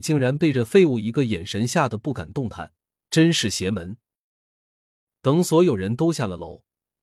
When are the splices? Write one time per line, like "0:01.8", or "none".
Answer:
none